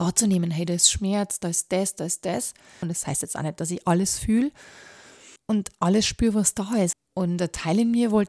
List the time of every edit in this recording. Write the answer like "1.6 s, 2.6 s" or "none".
2.8 s, 5.4 s, 6.9 s

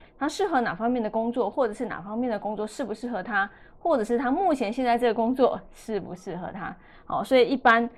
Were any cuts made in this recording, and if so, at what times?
none

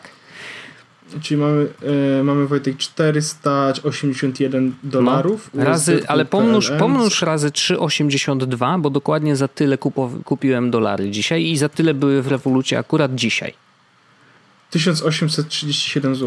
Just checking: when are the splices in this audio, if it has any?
none

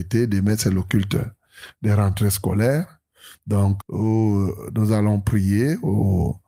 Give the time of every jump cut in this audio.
3.8 s

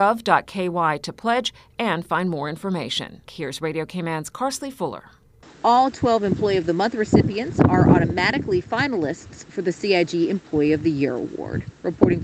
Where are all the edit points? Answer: 3.3 s, 5.4 s

